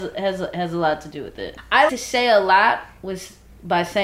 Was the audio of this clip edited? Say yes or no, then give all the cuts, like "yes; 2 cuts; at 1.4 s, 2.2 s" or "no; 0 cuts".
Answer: yes; 1 cut; at 1.9 s